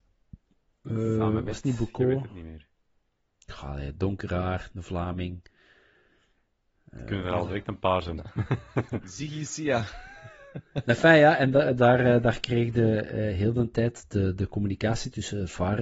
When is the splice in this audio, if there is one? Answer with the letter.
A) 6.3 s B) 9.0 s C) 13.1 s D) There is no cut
D